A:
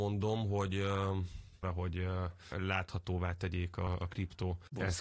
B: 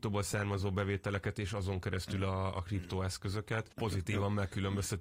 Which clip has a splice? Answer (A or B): A